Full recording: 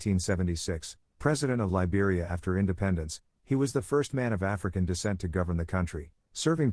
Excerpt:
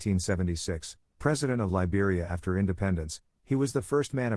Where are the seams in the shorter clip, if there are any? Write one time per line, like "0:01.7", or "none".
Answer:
none